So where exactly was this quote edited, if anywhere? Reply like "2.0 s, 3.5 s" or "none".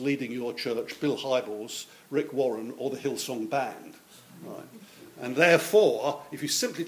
none